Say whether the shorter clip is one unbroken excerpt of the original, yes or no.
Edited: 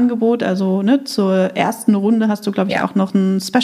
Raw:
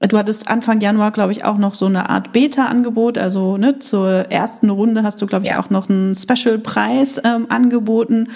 yes